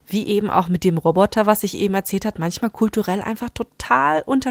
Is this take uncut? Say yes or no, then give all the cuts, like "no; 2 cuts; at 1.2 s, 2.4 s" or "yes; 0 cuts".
yes; 0 cuts